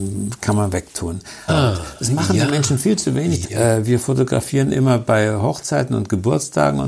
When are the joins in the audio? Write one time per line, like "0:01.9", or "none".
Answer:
0:01.5
0:03.4

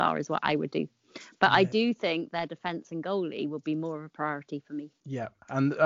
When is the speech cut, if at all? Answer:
none

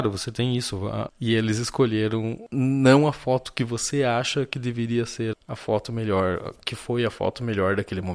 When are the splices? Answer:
0:01.1
0:05.3

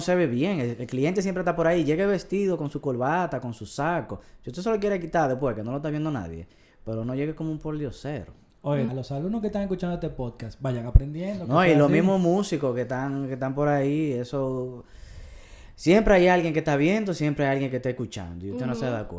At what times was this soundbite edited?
0:08.9

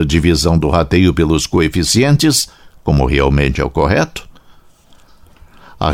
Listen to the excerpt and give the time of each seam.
none

